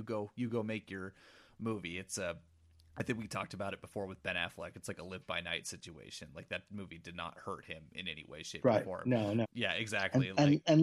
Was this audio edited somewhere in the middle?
yes; 1 cut; at 9.4 s

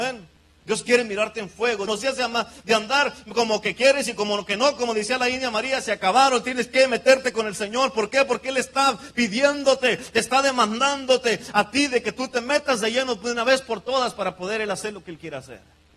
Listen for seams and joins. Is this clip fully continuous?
no; 1 cut; at 1.9 s

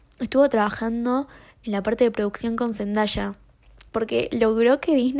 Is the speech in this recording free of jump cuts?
no; 1 cut; at 3.9 s

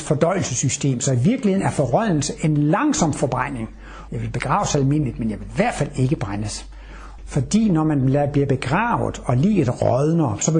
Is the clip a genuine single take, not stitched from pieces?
no; 2 cuts; at 4.1 s, 7.2 s

